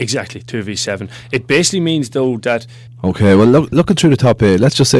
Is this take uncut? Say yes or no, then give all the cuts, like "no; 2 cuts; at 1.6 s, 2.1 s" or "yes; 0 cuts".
no; 1 cut; at 2.9 s